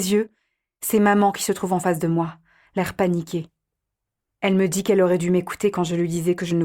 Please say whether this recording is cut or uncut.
uncut